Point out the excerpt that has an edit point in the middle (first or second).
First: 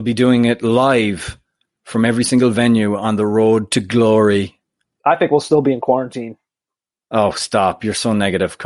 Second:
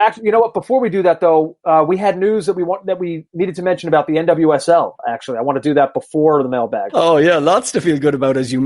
second